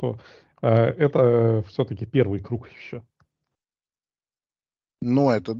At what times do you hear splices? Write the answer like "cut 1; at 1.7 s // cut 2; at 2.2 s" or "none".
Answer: none